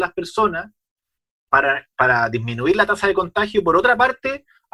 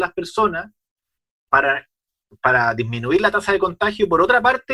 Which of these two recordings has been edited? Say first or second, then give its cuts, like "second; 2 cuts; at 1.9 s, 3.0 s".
first; 1 cut; at 1.9 s